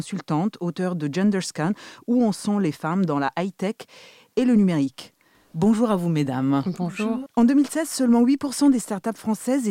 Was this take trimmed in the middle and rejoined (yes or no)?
yes